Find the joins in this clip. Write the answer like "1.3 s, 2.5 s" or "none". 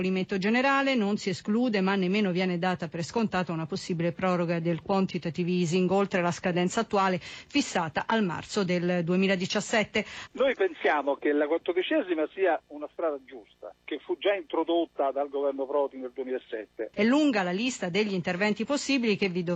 10.3 s, 16.9 s